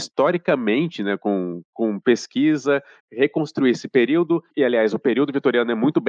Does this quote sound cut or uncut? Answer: cut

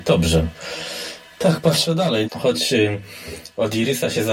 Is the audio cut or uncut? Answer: cut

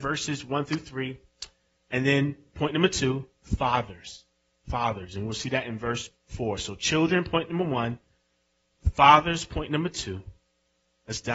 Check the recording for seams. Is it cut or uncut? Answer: uncut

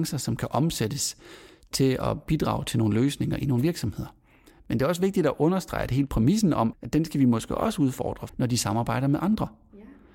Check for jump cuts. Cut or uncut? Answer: cut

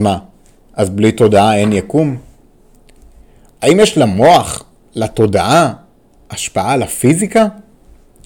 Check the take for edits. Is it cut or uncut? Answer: uncut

